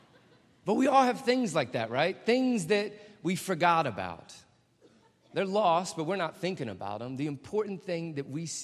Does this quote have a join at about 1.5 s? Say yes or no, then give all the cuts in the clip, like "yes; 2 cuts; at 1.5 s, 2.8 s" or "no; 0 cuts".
no; 0 cuts